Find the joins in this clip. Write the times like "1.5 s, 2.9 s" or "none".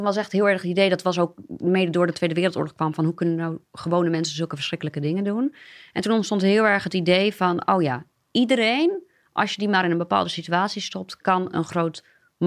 none

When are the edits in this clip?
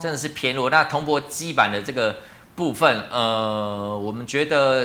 none

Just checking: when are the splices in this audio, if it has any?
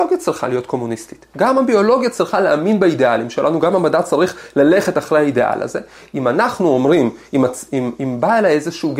none

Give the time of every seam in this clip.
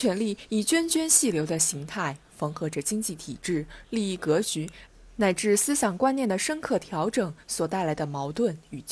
3.8 s

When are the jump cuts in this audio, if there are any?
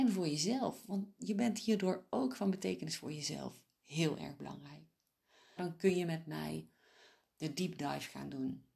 5.6 s

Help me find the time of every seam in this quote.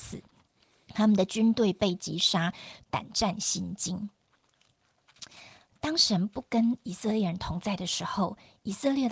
2.8 s

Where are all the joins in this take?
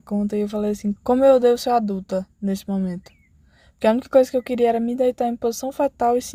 0.9 s

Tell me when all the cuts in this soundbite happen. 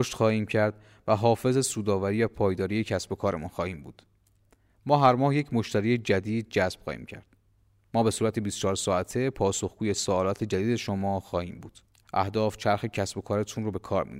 12.0 s

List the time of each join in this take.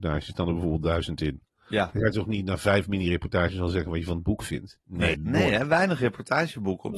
5.1 s

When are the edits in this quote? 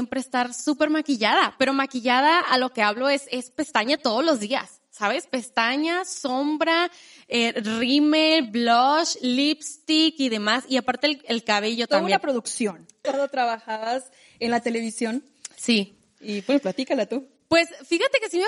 13.0 s

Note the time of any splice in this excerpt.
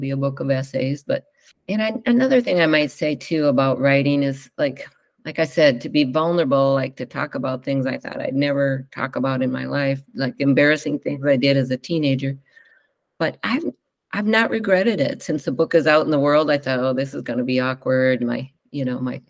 none

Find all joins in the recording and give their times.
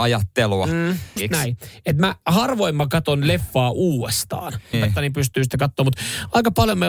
1.2 s, 4.7 s

